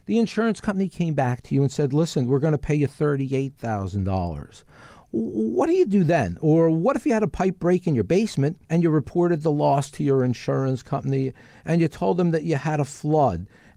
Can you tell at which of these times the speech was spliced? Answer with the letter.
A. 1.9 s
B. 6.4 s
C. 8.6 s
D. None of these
C